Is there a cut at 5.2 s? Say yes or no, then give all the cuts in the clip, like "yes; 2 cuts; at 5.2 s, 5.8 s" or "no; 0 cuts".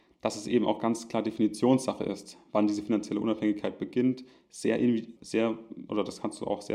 yes; 1 cut; at 5.2 s